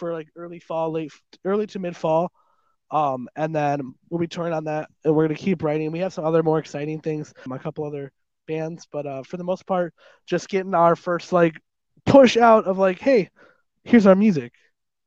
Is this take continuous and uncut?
no; 1 cut; at 7.5 s

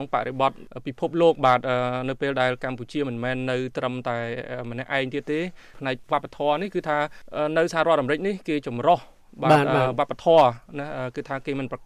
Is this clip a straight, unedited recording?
yes; 0 cuts

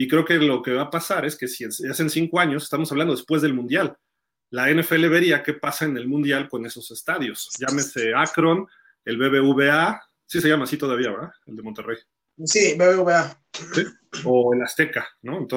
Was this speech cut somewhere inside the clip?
no; 0 cuts

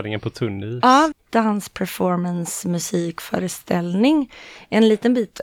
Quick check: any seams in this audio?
yes; 1 cut; at 1.1 s

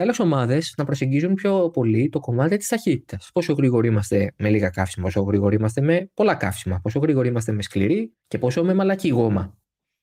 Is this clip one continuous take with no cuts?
yes; 0 cuts

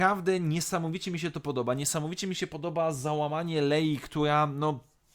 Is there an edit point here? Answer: no; 0 cuts

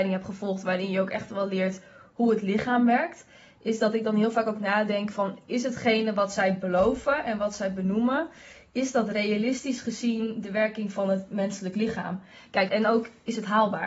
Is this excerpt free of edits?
no; 2 cuts; at 5.1 s, 12.7 s

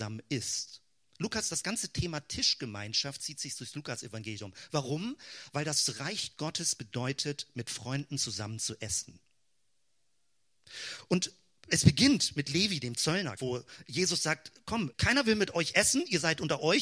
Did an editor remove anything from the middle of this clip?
yes; 1 cut; at 13.4 s

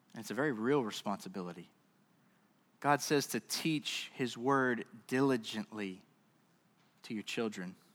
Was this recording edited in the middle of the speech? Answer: no; 0 cuts

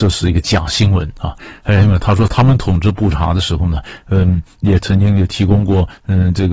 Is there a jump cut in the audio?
no; 0 cuts

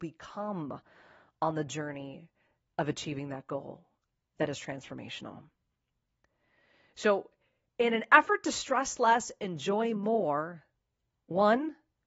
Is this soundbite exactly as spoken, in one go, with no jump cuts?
yes; 0 cuts

